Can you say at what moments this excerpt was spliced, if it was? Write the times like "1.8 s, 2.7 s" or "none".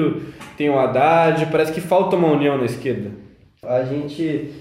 3.6 s